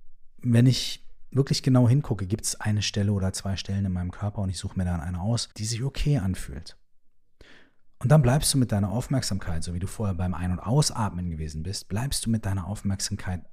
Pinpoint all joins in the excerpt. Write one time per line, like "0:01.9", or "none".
0:05.5